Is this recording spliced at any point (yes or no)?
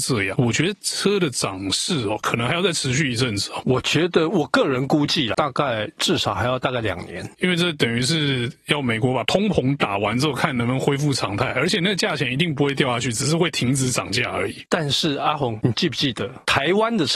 no